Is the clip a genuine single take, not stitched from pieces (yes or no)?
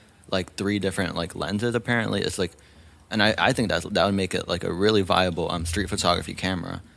yes